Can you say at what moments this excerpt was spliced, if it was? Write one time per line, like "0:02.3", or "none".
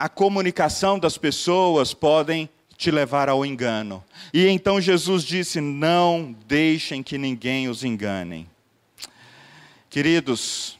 0:04.3

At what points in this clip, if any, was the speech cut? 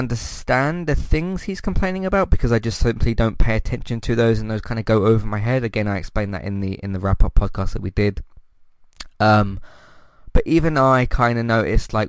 none

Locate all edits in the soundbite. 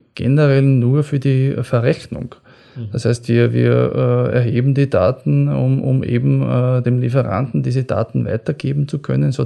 0:06.8

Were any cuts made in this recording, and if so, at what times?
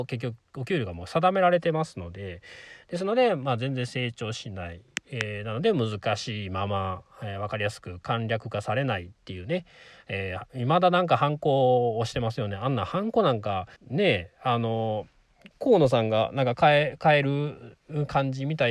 0:13.8
0:15.5

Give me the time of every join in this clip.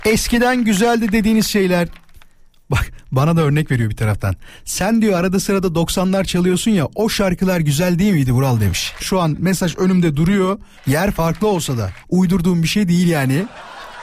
0:09.0
0:10.8
0:12.0

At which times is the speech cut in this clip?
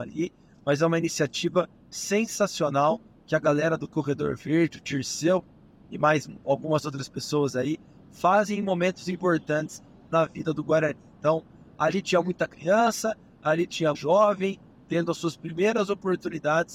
0:13.9

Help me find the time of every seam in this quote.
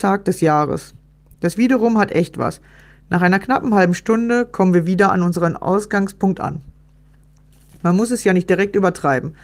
none

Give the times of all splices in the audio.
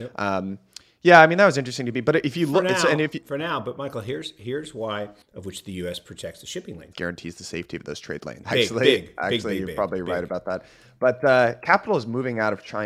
0:05.2
0:06.9
0:08.4

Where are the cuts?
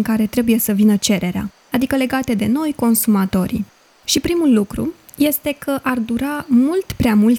none

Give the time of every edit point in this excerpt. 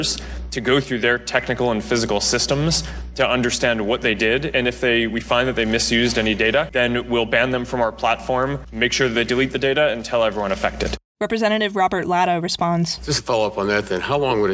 none

